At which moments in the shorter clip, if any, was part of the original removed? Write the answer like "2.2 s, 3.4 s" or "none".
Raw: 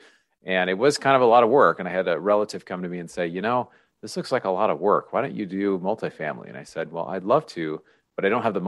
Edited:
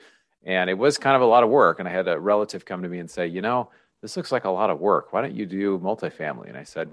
none